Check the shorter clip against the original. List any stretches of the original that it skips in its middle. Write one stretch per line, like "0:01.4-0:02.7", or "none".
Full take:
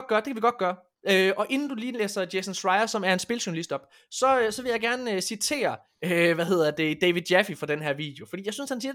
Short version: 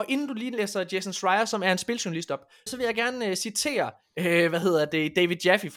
0:04.1-0:04.5